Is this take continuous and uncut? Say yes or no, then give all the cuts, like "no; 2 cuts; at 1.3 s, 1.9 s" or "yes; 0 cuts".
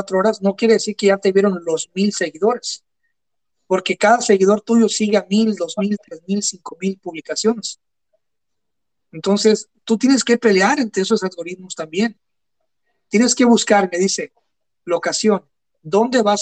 yes; 0 cuts